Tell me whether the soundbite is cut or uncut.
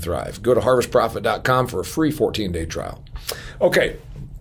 uncut